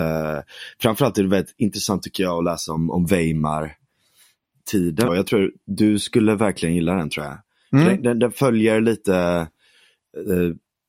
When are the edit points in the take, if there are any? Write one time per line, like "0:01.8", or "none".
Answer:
0:05.1